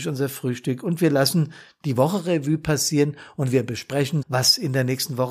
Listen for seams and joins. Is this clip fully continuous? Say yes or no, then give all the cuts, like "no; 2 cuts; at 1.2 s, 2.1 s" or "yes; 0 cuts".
no; 1 cut; at 4.2 s